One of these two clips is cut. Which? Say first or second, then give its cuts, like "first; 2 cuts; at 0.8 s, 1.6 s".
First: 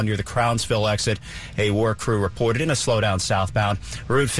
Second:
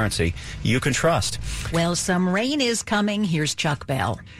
second; 1 cut; at 1.7 s